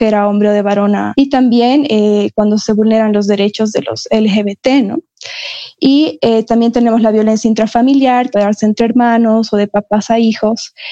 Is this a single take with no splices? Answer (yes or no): no